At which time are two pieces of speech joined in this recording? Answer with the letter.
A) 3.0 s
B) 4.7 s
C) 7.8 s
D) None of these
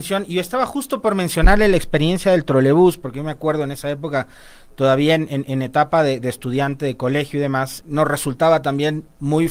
C